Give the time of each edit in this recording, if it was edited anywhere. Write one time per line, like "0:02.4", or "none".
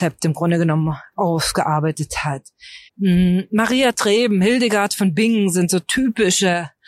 0:02.9